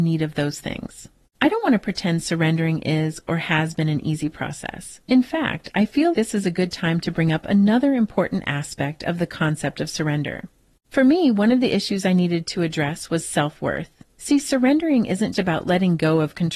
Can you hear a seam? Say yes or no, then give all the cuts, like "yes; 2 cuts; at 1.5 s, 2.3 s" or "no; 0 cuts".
yes; 3 cuts; at 6.1 s, 10.8 s, 15.3 s